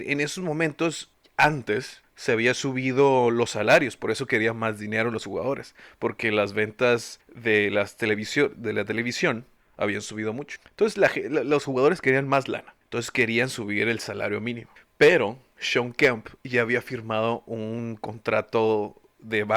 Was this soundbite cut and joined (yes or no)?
yes